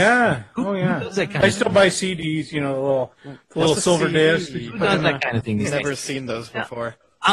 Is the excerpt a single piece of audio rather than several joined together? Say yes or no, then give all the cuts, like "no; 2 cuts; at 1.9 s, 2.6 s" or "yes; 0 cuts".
yes; 0 cuts